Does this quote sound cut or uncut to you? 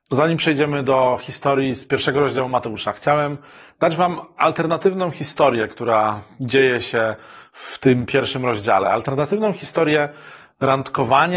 uncut